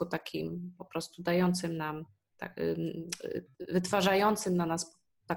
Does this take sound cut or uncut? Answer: uncut